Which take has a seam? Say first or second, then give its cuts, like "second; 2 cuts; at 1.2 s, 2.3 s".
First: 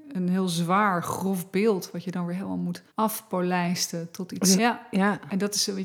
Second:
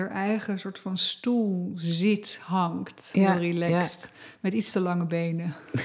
first; 2 cuts; at 2.9 s, 4.6 s